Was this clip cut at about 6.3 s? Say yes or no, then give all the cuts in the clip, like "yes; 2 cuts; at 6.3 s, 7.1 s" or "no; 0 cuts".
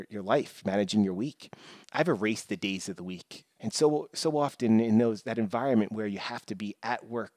no; 2 cuts; at 1.8 s, 3.6 s